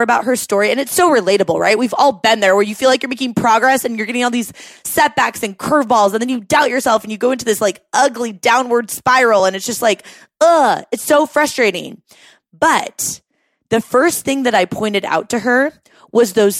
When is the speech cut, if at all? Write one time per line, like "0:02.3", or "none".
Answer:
none